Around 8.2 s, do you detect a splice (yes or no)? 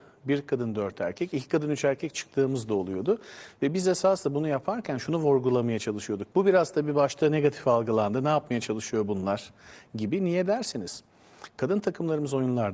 no